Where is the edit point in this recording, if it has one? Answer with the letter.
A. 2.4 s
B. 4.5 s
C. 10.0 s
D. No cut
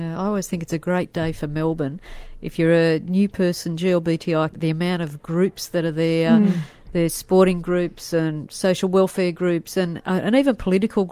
B